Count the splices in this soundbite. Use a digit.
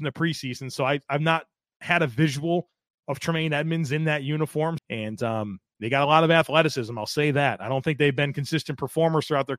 1